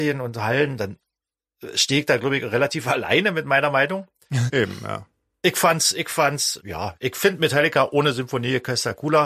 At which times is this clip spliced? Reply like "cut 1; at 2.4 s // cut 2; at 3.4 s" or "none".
cut 1; at 4.5 s // cut 2; at 6.6 s